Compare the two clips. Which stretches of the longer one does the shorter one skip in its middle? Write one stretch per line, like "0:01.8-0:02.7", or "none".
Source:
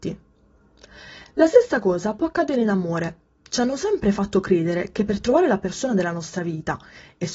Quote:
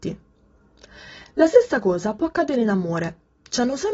none